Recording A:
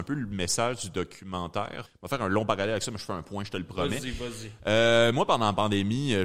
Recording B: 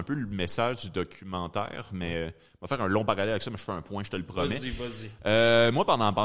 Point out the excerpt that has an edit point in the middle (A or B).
A